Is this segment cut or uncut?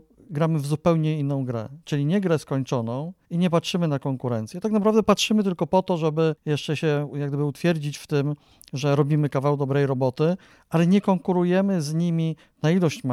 uncut